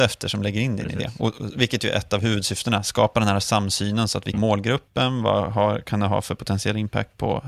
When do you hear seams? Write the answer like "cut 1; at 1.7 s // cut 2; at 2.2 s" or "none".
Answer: cut 1; at 4.3 s